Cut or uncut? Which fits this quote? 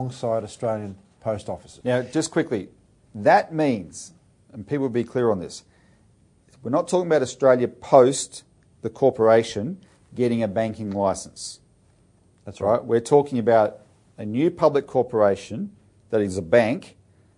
cut